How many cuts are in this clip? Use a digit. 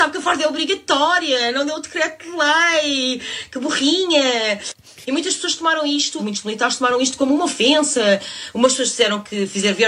2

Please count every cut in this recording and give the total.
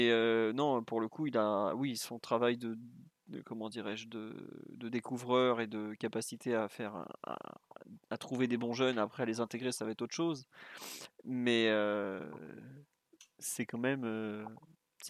0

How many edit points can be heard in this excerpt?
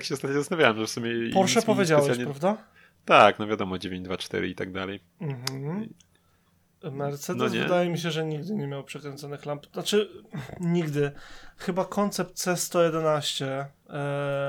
0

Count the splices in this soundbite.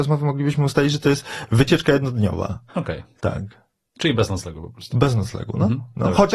1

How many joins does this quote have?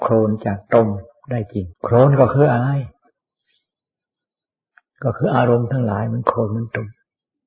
1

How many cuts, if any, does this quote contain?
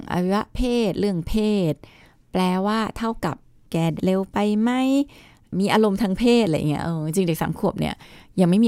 1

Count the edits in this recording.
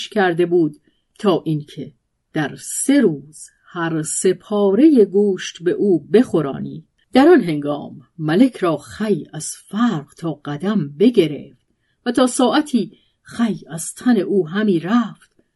0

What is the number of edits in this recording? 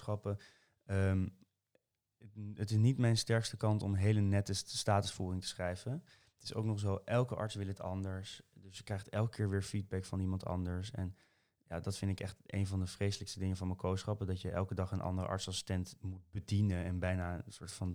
0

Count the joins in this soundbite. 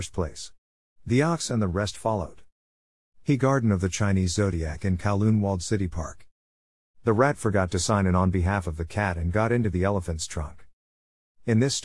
0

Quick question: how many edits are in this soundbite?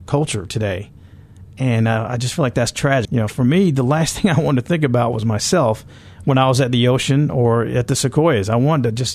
1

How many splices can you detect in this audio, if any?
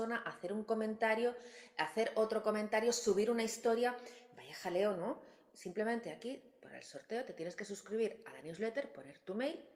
0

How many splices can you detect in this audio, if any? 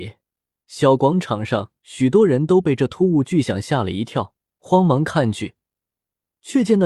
0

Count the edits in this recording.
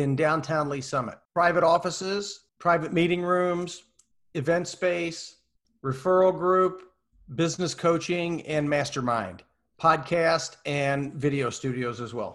1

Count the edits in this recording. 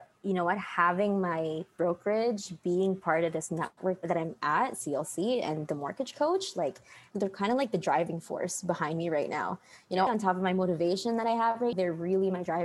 2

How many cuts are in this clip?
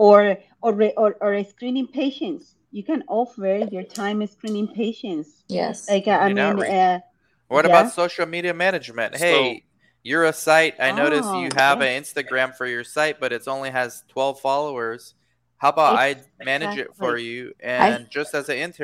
0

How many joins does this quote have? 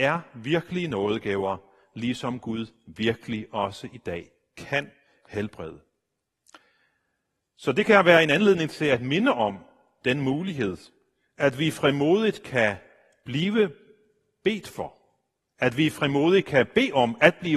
0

